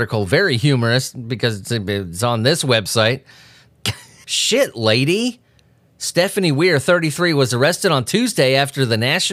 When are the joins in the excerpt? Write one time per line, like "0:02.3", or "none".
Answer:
0:04.2